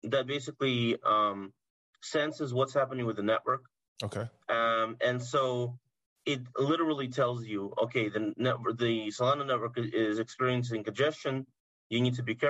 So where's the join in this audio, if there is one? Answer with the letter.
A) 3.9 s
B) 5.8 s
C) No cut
C